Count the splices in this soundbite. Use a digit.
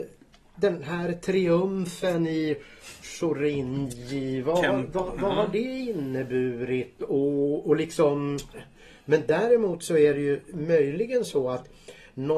1